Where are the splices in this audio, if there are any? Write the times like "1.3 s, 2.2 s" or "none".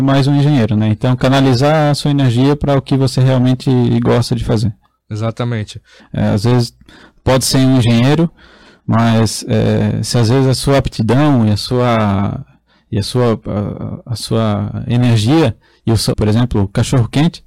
6.0 s, 16.1 s

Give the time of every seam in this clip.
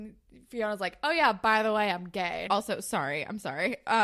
2.5 s

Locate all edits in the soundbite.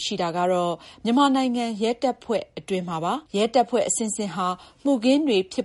3.3 s

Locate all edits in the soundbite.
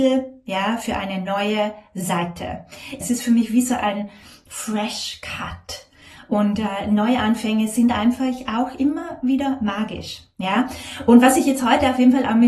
3.0 s

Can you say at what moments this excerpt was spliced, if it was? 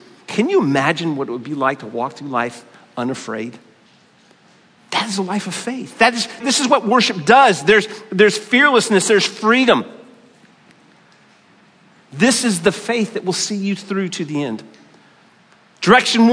4.8 s, 6.4 s

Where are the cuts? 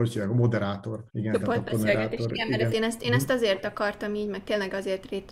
1.1 s, 2.7 s

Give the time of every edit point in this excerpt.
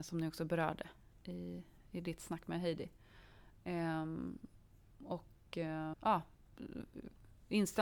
5.9 s

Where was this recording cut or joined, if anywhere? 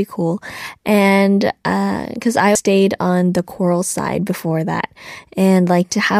2.6 s

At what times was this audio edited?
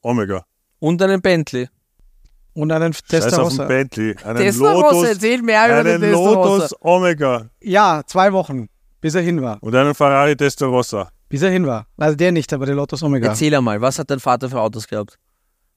none

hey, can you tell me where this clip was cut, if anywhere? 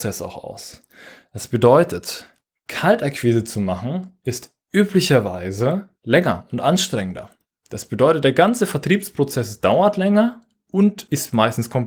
none

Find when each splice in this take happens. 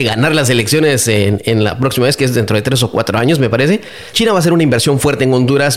4.1 s

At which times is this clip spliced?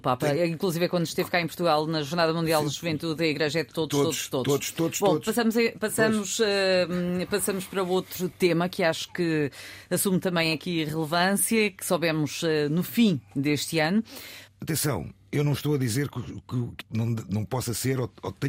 14.5 s, 16.8 s

